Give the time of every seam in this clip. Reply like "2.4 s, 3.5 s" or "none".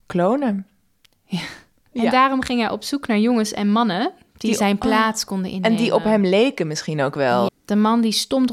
1.9 s, 7.5 s